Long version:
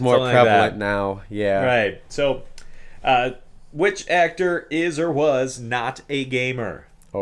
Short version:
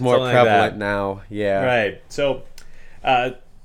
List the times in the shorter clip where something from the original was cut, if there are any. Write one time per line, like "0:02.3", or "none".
none